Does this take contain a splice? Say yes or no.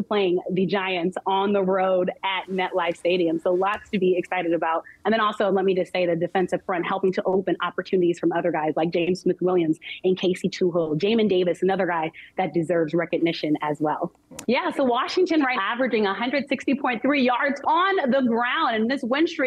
yes